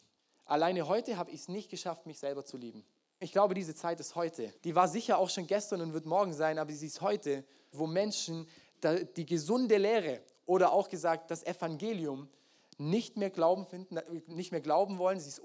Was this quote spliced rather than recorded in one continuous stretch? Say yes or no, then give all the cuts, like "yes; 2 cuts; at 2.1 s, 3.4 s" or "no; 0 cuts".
yes; 3 cuts; at 3.2 s, 4.6 s, 7.7 s